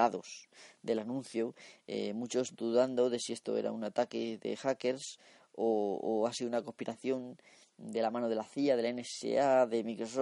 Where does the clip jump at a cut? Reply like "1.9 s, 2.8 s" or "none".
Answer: none